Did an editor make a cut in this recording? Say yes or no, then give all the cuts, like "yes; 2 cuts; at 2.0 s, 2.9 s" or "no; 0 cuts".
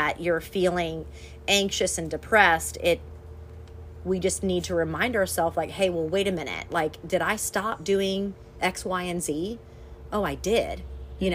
no; 0 cuts